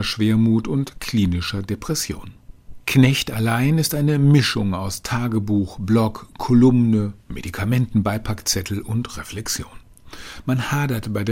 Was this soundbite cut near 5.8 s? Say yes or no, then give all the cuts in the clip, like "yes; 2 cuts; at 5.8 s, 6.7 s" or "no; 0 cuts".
no; 0 cuts